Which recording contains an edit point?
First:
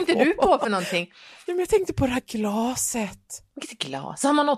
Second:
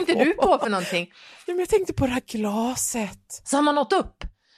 second; 1 cut; at 3.4 s

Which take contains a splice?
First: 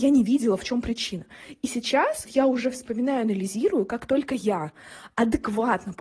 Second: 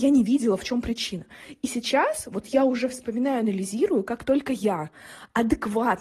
first; 1 cut; at 2.2 s

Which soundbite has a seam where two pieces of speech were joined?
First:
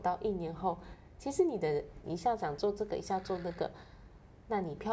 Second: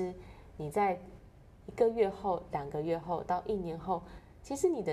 first; 1 cut; at 2.0 s

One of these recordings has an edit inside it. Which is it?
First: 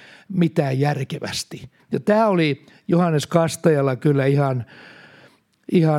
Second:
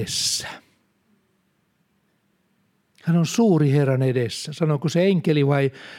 first; 1 cut; at 1.8 s

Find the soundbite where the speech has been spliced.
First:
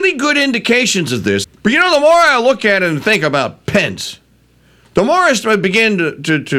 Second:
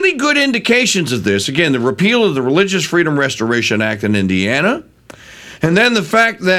first; 1 cut; at 1.4 s

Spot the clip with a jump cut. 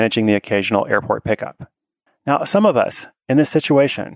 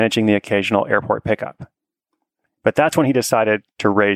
first; 1 cut; at 2.1 s

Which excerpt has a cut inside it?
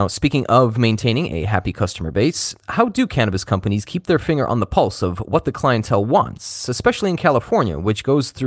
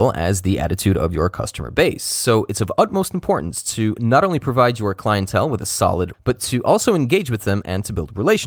second; 1 cut; at 6.1 s

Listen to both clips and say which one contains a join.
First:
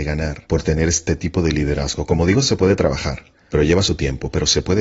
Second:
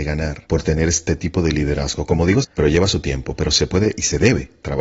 second; 1 cut; at 2.4 s

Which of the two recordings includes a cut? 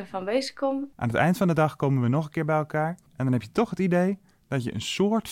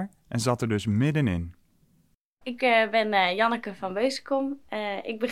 first; 2 cuts; at 0.9 s, 3.1 s

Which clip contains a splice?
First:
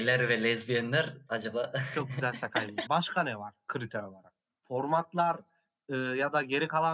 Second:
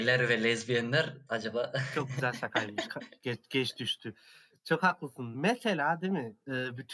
first; 1 cut; at 2.9 s

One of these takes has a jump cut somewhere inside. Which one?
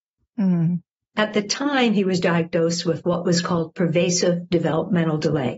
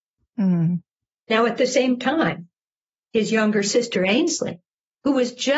first; 1 cut; at 1.1 s

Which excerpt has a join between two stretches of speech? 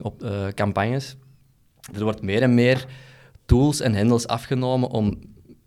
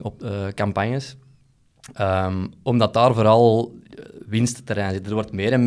first; 1 cut; at 1.9 s

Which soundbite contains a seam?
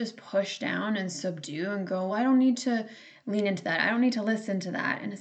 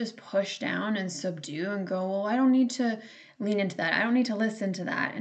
first; 1 cut; at 2.1 s

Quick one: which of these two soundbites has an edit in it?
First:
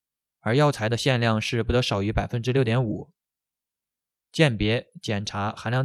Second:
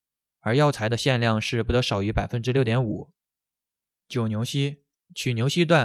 second; 1 cut; at 3.9 s

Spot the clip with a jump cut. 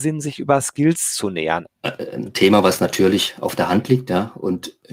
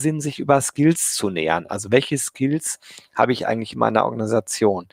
first; 1 cut; at 1.7 s

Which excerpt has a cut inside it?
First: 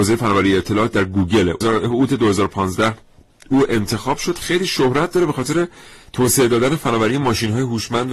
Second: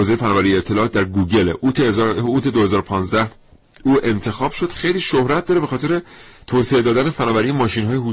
first; 1 cut; at 1.6 s

